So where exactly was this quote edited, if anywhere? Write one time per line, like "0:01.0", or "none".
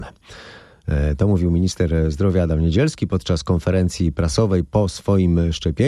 none